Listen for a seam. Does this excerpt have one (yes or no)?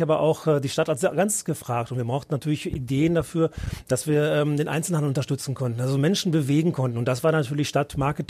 no